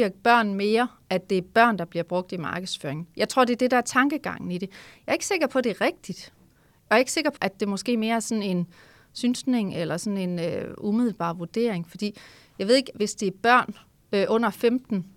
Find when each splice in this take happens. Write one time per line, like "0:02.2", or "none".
0:07.4
0:12.9